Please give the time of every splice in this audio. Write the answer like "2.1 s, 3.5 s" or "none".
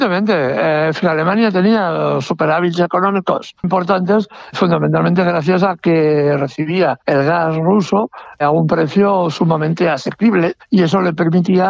3.6 s